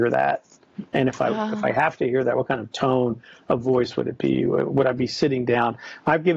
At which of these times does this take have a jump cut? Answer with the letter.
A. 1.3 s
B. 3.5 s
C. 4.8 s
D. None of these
D